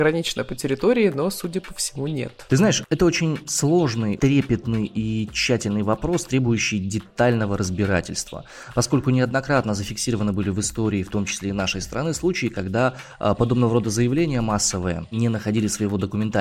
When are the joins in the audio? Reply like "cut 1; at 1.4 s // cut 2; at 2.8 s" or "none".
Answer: cut 1; at 4.2 s